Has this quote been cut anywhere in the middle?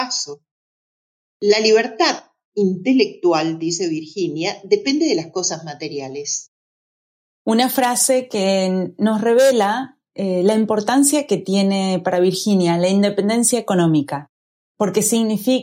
no; 0 cuts

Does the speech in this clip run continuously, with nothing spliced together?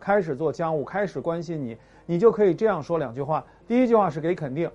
yes; 0 cuts

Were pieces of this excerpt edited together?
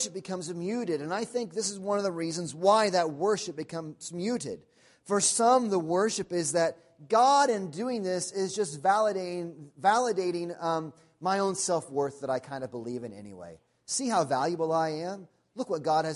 no; 0 cuts

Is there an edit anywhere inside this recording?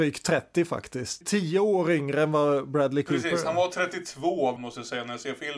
yes; 1 cut; at 4.6 s

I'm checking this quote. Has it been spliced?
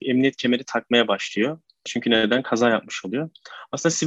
yes; 1 cut; at 1.9 s

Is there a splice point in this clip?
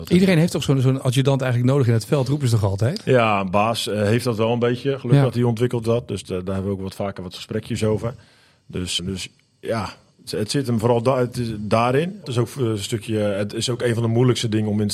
yes; 2 cuts; at 9.0 s, 12.2 s

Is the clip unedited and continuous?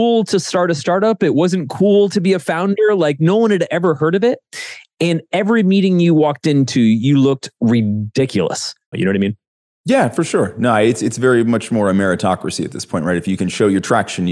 no; 1 cut; at 8.9 s

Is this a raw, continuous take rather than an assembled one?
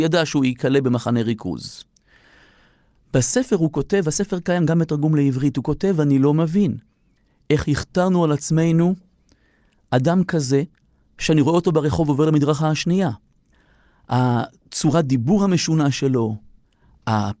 yes; 0 cuts

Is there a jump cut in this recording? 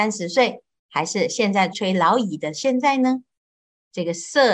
yes; 1 cut; at 1.7 s

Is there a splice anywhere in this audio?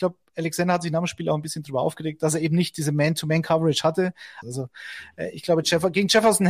yes; 1 cut; at 4.4 s

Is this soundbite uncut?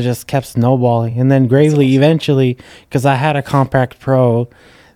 yes; 0 cuts

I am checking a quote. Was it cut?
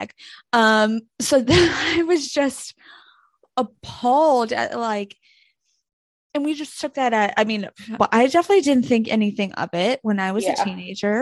yes; 1 cut; at 8.0 s

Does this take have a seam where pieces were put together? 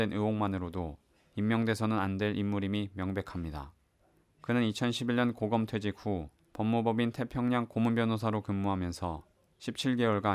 no; 0 cuts

